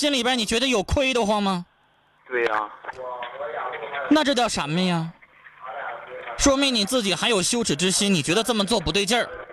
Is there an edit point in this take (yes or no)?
no